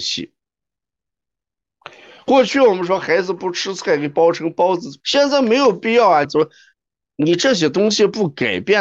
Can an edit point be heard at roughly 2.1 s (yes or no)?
no